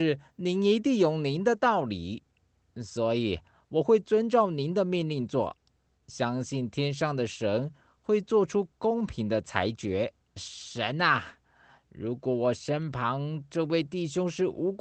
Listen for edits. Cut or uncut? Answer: cut